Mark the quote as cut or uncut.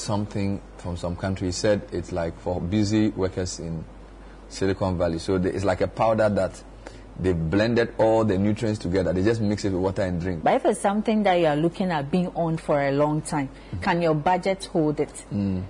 cut